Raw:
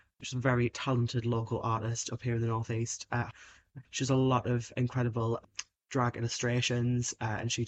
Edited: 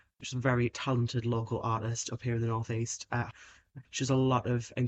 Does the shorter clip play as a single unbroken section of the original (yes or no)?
yes